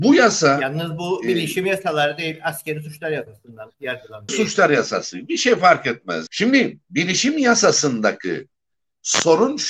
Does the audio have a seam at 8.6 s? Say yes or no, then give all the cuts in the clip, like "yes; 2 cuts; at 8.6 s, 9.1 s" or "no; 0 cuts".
no; 2 cuts; at 4.3 s, 6.3 s